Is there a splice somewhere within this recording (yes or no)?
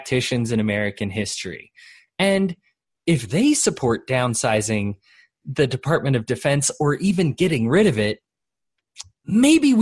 no